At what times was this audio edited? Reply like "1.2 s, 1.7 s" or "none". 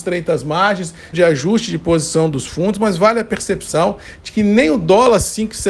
1.1 s

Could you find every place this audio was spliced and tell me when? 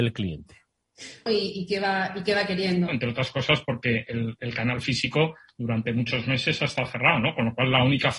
1.3 s, 2.9 s

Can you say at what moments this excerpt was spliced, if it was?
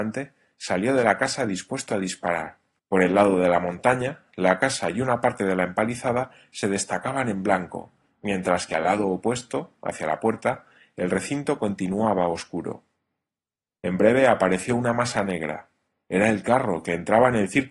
2.8 s

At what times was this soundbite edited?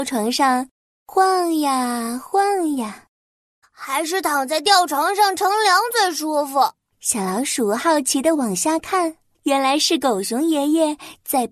3.6 s, 6.9 s, 9.3 s

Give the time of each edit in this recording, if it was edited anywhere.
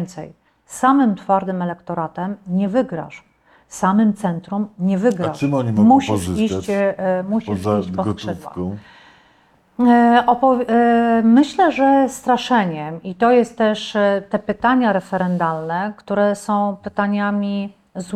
none

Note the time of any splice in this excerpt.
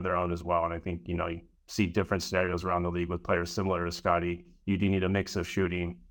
none

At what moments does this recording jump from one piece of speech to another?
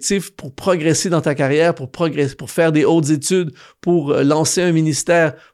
none

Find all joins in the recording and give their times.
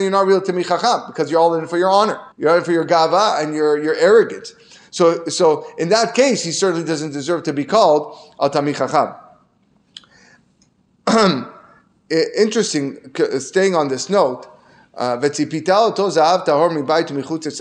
2.3 s

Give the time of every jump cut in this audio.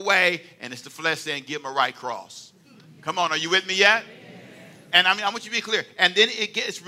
none

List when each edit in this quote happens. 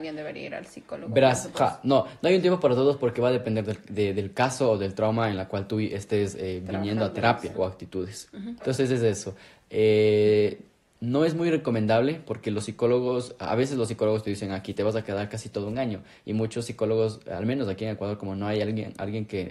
1.5 s, 7.5 s, 8.6 s

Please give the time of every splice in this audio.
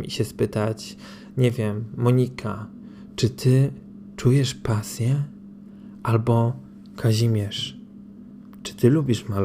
none

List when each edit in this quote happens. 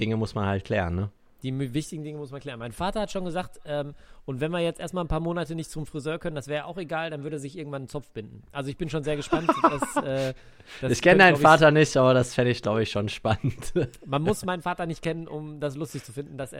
none

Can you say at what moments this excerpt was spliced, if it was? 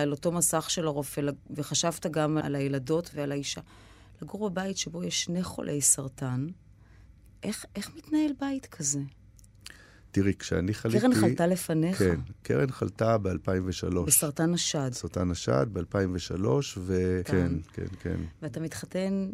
17.2 s

